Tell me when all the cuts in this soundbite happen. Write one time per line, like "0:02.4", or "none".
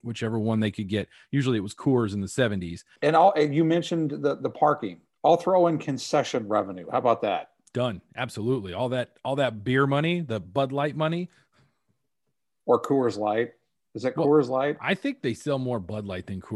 0:03.0